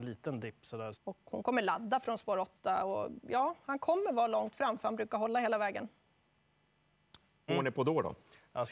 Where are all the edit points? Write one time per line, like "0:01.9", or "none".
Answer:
0:00.9
0:07.5